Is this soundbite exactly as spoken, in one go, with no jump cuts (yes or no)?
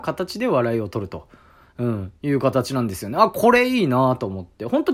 yes